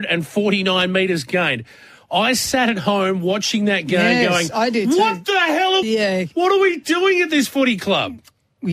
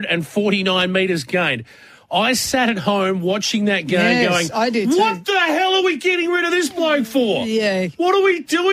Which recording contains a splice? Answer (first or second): first